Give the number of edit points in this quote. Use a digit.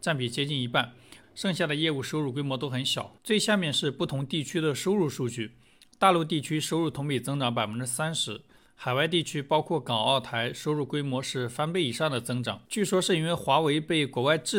1